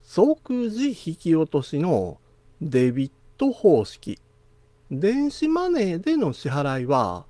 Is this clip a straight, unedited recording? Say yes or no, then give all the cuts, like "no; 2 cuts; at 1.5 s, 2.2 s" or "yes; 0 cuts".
no; 1 cut; at 4.7 s